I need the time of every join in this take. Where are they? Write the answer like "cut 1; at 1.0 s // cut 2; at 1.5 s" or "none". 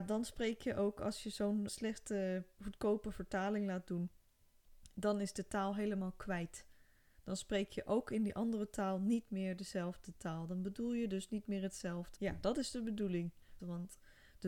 cut 1; at 1.7 s // cut 2; at 12.2 s // cut 3; at 13.6 s